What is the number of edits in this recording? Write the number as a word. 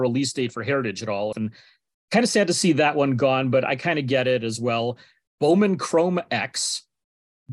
two